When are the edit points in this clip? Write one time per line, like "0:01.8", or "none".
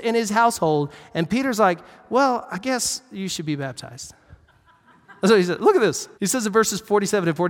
0:06.1